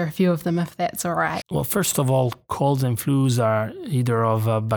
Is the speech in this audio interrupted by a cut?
yes; 1 cut; at 1.4 s

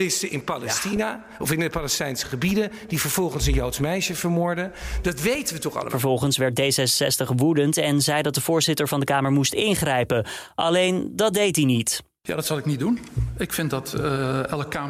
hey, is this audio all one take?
yes; 0 cuts

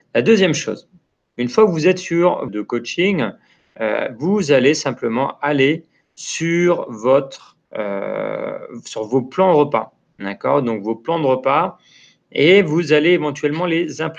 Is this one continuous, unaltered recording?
no; 2 cuts; at 2.5 s, 7.6 s

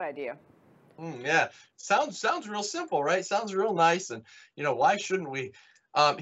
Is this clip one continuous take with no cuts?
yes; 0 cuts

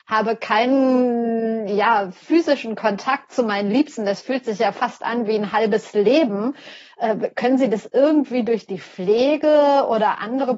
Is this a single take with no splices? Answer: yes; 0 cuts

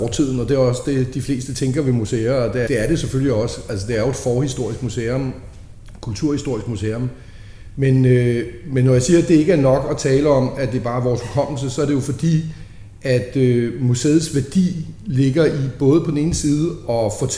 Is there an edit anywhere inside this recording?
yes; 1 cut; at 2.7 s

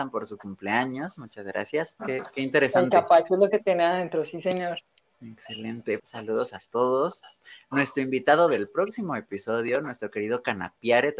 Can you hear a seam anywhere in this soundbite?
yes; 2 cuts; at 2.0 s, 6.0 s

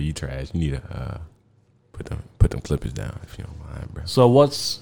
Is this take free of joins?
yes; 0 cuts

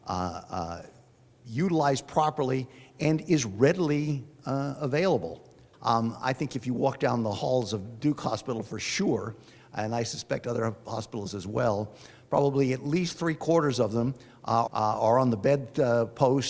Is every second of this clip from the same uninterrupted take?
no; 2 cuts; at 5.7 s, 14.7 s

